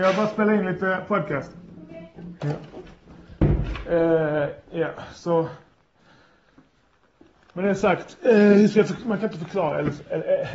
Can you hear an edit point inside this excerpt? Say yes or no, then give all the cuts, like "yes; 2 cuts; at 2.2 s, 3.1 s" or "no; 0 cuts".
no; 0 cuts